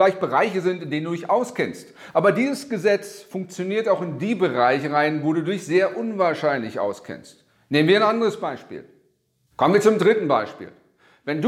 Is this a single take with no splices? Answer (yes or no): no